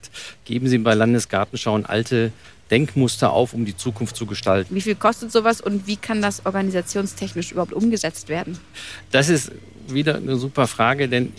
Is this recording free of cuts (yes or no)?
no